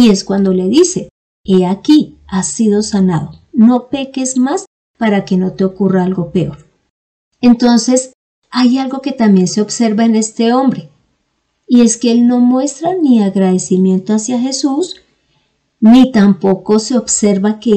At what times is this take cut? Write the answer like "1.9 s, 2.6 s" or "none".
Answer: none